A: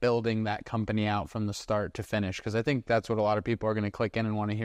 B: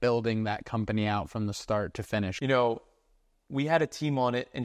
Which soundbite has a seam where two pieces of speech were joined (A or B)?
B